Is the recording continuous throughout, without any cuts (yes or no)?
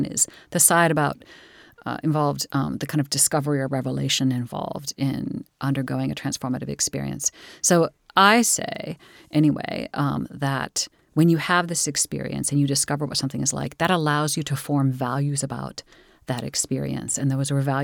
yes